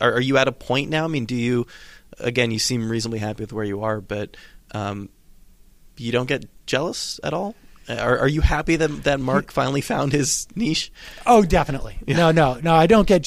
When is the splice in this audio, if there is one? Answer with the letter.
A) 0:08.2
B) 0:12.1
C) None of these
C